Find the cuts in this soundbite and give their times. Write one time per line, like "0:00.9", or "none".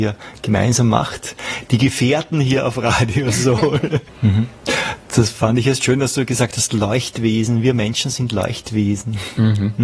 0:04.1